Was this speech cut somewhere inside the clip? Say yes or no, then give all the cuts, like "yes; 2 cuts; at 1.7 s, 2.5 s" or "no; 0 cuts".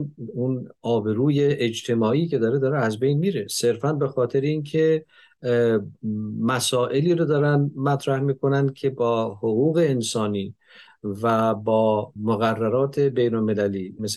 no; 0 cuts